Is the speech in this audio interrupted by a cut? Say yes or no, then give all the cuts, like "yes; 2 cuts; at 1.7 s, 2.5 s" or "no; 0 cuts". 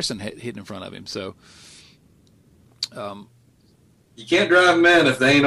no; 0 cuts